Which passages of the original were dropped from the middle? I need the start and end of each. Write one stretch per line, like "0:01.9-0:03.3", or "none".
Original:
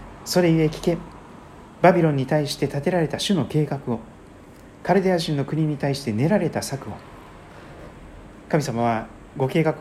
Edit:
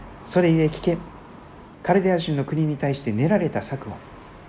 0:01.7-0:04.7